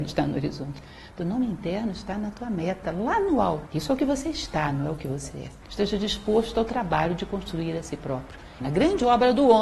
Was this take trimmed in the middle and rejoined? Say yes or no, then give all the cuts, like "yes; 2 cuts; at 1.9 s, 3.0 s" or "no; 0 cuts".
yes; 3 cuts; at 3.7 s, 5.6 s, 8.6 s